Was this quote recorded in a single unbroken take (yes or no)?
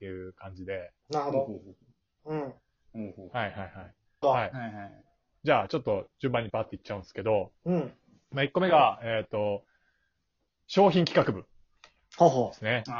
no